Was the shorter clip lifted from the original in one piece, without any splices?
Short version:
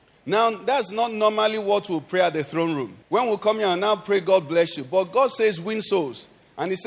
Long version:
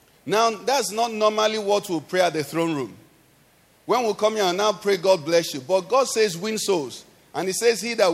no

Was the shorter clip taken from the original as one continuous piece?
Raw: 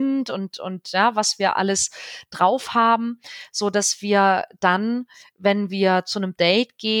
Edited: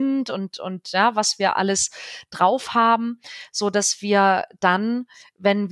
yes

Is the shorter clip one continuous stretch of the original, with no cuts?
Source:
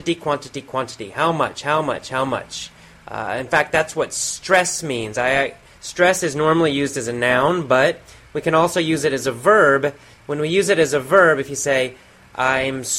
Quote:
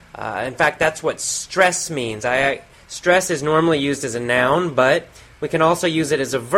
yes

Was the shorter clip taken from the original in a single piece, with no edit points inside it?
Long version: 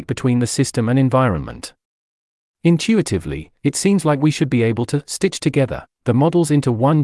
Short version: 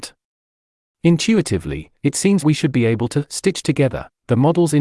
no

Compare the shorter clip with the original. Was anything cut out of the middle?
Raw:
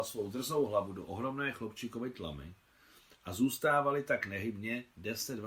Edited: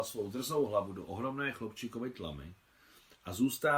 no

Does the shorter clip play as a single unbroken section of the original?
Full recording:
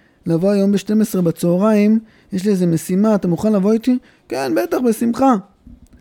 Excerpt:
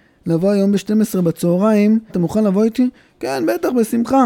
no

